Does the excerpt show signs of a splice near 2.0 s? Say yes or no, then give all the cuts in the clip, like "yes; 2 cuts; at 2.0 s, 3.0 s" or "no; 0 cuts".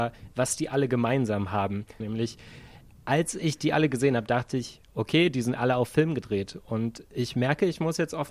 yes; 1 cut; at 2.0 s